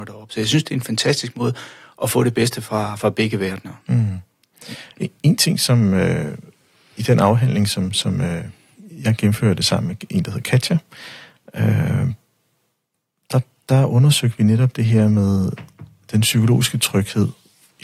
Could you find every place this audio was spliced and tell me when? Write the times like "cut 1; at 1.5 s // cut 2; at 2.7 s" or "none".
none